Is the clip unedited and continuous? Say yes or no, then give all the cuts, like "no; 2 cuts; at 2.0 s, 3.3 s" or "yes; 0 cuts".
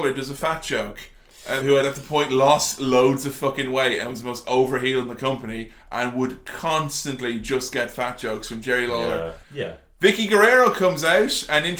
no; 2 cuts; at 1.6 s, 9.4 s